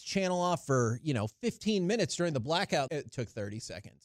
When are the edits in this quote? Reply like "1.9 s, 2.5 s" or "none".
2.9 s

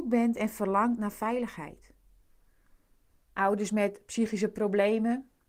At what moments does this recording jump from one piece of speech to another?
3.2 s

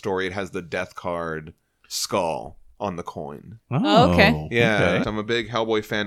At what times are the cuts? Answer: 5.0 s

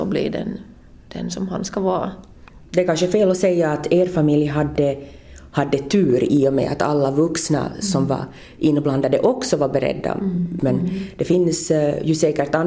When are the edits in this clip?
2.7 s, 10.6 s

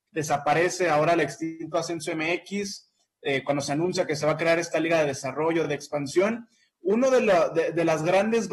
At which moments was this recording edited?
none

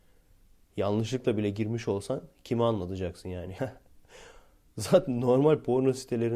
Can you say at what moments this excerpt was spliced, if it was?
3.6 s

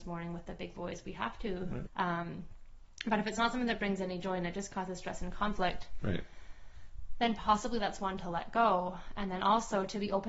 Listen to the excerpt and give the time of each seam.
1.9 s

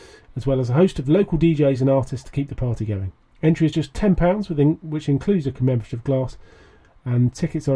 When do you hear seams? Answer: none

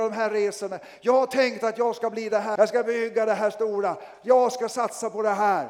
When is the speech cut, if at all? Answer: 2.6 s

